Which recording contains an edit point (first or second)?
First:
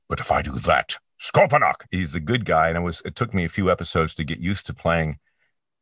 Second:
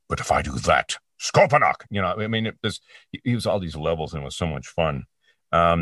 first